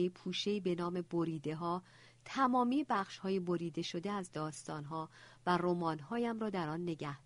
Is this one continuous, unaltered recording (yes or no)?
yes